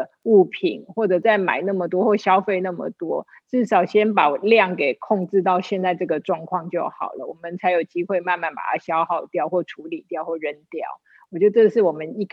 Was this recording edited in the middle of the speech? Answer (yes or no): no